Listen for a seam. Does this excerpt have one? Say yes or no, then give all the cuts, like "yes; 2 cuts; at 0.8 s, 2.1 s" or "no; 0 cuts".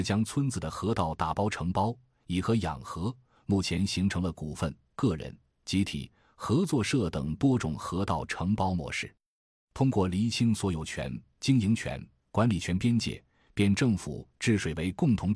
no; 0 cuts